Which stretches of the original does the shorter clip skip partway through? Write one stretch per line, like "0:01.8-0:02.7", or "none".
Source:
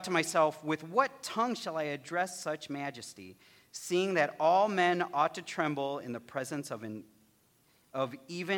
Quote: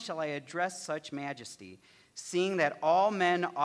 none